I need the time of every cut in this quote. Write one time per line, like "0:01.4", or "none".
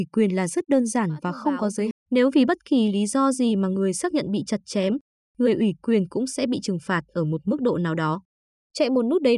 0:01.9
0:05.2